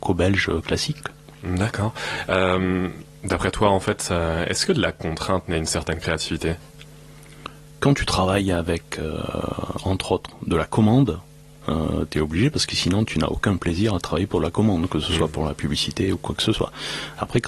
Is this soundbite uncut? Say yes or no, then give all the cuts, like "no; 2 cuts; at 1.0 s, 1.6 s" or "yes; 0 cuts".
no; 1 cut; at 11.6 s